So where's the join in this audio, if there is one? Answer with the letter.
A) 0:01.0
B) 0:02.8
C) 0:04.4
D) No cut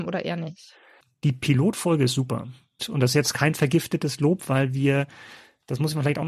B